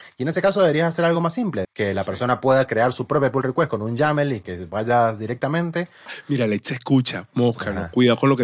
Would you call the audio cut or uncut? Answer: cut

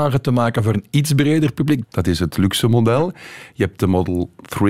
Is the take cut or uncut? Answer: cut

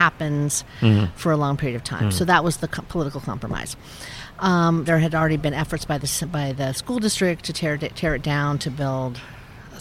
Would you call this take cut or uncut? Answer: cut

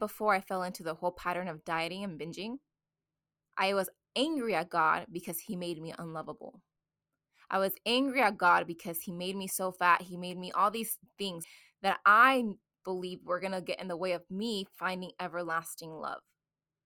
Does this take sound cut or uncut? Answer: uncut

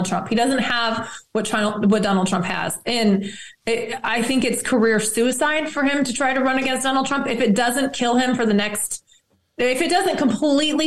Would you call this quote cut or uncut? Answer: uncut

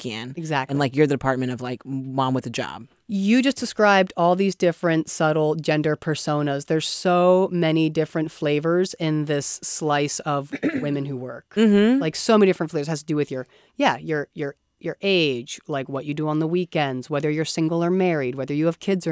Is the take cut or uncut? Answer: uncut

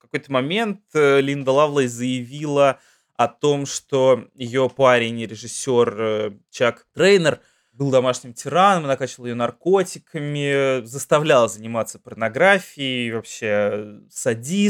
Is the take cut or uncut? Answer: uncut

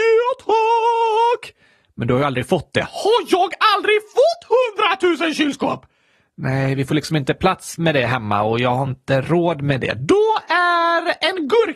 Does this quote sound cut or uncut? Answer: uncut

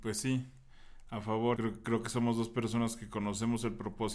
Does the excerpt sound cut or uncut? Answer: cut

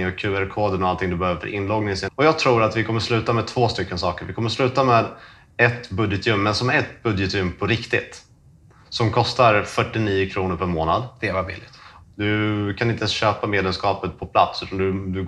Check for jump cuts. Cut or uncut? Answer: cut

